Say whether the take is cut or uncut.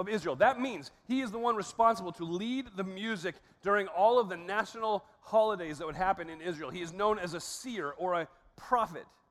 cut